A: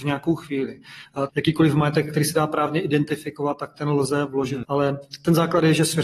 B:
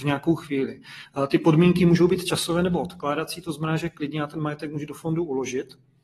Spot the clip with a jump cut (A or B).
A